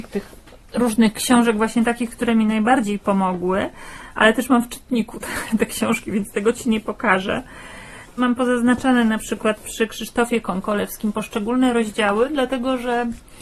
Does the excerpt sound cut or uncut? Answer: uncut